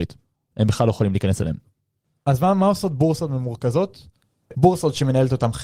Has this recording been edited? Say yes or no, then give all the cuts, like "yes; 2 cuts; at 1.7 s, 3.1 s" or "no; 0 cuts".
yes; 1 cut; at 4.5 s